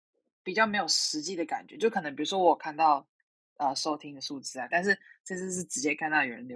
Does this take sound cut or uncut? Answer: cut